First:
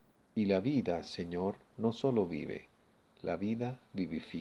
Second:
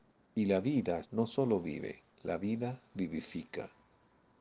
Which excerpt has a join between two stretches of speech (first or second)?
second